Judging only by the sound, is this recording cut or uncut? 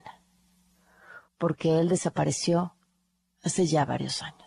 cut